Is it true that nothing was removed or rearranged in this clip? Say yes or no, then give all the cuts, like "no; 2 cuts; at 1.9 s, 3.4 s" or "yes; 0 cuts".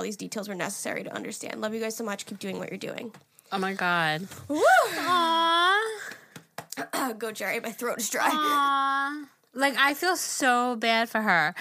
yes; 0 cuts